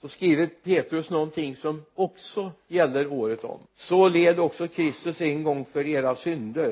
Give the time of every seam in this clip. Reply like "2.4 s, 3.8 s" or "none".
3.6 s